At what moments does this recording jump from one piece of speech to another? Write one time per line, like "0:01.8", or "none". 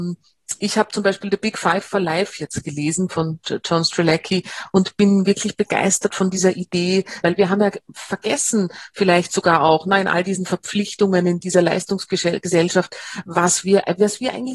0:07.2